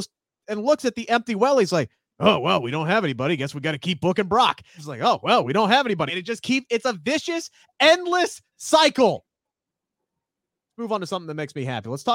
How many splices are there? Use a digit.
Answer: 2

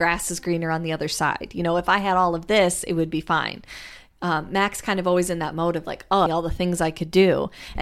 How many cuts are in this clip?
1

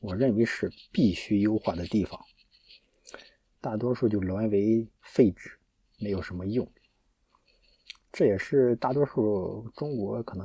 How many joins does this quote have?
1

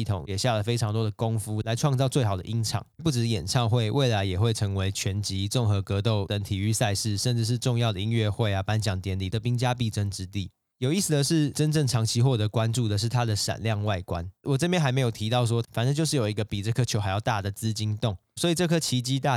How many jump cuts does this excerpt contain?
2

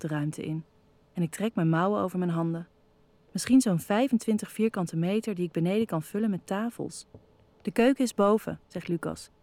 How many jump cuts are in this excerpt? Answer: 2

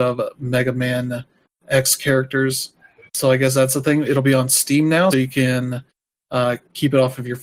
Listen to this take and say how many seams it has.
2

